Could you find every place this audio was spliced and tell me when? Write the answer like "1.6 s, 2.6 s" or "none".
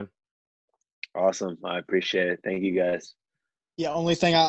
none